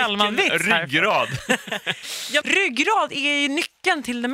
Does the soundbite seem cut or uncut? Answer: cut